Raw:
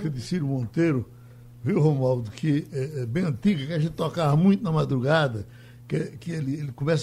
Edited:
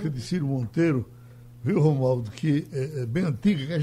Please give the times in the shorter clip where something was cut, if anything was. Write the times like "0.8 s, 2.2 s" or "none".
none

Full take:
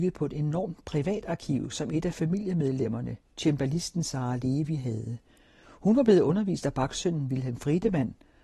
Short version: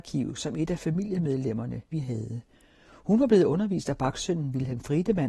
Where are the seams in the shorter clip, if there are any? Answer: 1.9 s

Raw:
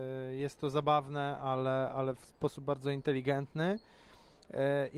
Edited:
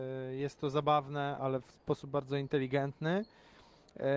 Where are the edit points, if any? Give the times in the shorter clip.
1.4 s

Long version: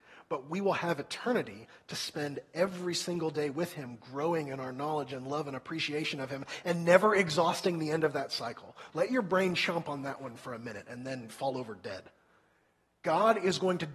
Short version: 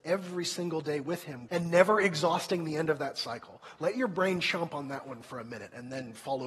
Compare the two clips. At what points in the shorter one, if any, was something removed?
1.5 s

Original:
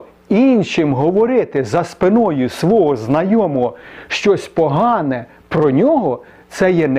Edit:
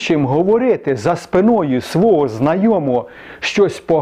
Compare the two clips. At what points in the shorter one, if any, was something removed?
none

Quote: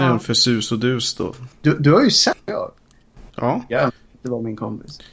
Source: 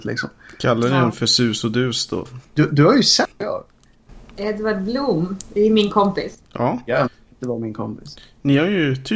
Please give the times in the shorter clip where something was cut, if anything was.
3.3 s

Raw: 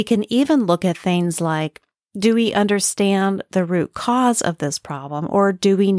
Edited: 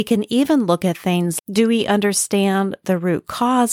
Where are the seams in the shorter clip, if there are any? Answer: 1.4 s

